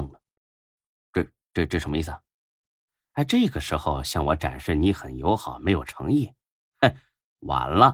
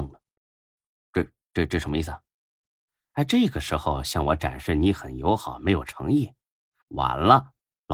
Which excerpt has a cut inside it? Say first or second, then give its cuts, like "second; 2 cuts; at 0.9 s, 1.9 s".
second; 1 cut; at 6.8 s